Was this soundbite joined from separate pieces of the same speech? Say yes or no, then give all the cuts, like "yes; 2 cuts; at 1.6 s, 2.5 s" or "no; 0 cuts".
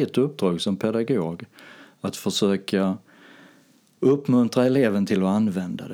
no; 0 cuts